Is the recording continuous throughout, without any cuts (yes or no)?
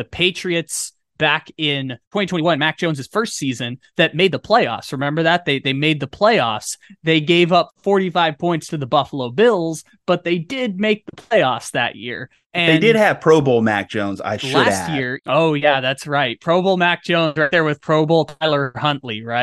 yes